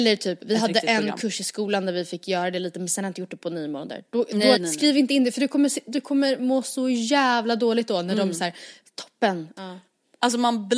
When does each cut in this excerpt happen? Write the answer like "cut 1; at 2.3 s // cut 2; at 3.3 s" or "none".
cut 1; at 4.6 s // cut 2; at 9.6 s